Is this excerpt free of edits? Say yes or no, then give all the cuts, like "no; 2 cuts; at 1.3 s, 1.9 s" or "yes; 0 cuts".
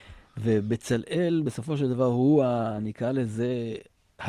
yes; 0 cuts